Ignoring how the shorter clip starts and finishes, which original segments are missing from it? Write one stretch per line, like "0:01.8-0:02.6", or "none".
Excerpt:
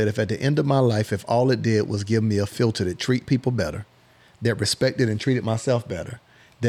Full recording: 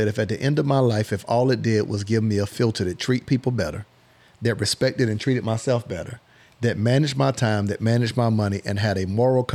none